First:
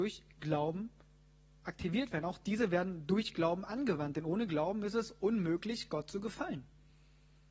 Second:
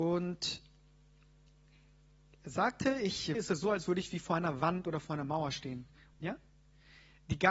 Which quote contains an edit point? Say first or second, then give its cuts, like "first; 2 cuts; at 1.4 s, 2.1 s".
second; 2 cuts; at 3.3 s, 6.1 s